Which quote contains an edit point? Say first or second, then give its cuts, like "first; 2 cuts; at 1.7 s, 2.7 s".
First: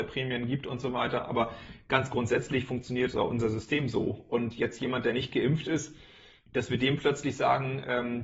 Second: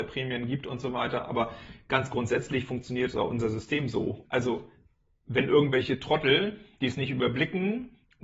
second; 1 cut; at 4.2 s